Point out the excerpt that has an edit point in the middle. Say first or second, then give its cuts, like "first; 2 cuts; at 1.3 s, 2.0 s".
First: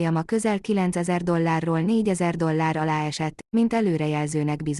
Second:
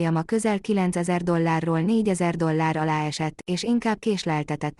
first; 1 cut; at 3.4 s